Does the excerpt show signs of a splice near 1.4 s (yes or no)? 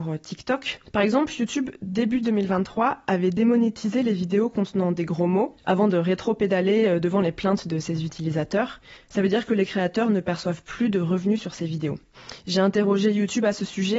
no